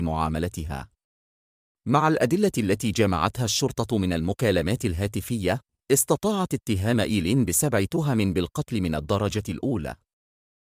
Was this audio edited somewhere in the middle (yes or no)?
no